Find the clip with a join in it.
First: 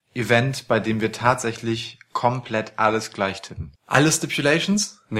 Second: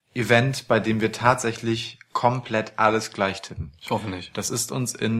first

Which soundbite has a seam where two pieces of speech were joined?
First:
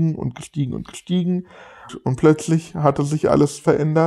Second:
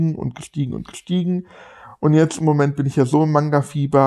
first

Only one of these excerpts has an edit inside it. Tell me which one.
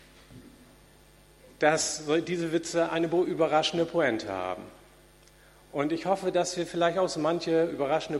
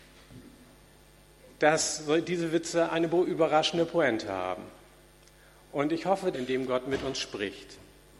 second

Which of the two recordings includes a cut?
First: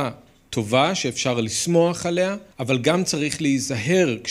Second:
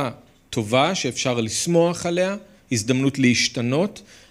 first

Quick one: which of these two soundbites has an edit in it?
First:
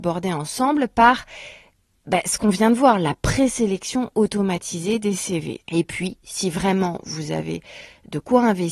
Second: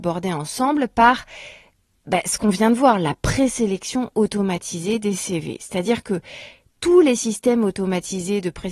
first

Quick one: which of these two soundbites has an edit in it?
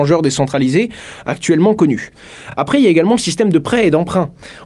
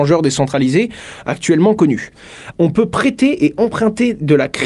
second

